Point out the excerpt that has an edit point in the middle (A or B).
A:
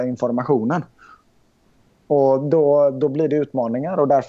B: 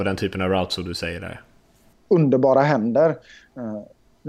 B